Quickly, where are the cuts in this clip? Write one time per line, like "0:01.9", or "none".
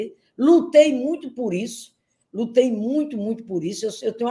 none